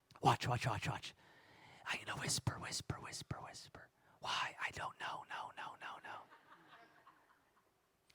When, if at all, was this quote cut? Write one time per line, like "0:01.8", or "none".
none